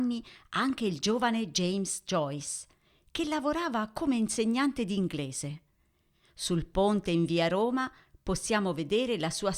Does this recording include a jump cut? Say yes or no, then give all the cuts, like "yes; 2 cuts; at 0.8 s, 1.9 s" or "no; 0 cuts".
no; 0 cuts